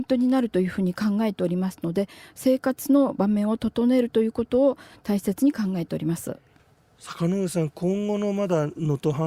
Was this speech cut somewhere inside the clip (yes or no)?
no